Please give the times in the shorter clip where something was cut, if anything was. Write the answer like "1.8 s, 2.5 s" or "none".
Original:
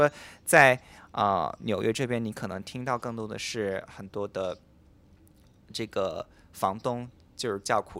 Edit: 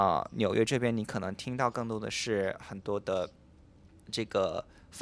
4.0 s